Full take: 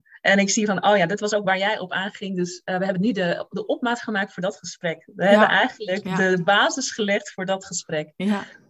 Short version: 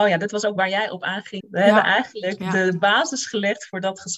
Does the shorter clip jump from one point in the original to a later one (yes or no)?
yes